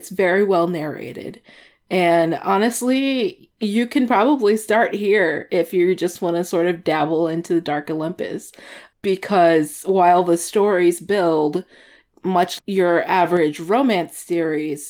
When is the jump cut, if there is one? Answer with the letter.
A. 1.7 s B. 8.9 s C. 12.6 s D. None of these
C